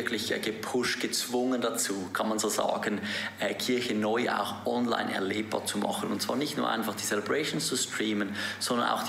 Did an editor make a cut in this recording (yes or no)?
no